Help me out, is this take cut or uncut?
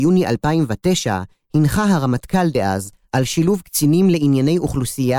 cut